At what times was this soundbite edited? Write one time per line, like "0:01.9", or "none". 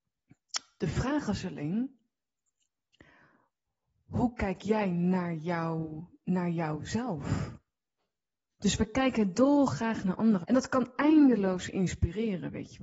0:08.5
0:10.4